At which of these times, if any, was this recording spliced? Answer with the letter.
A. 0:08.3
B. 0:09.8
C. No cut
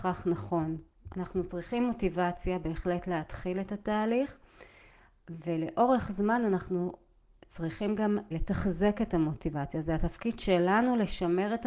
A